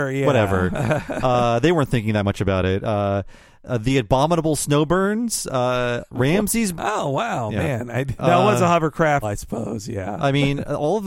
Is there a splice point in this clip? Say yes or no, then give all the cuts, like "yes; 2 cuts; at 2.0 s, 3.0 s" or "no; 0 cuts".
yes; 3 cuts; at 6.8 s, 8.2 s, 9.2 s